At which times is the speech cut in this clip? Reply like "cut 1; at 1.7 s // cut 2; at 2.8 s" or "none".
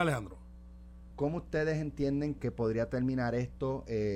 cut 1; at 1.1 s // cut 2; at 2.4 s